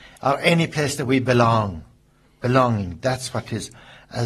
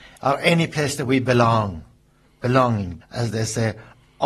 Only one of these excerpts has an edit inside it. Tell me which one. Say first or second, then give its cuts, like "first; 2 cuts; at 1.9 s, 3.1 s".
second; 1 cut; at 3.0 s